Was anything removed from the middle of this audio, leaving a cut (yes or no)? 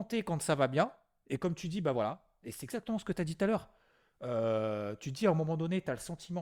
no